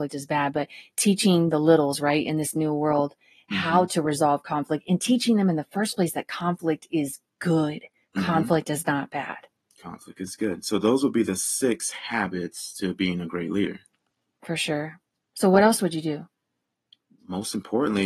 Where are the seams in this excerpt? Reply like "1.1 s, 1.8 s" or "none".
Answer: none